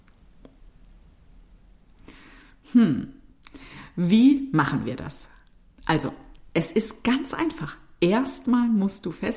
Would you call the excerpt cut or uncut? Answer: uncut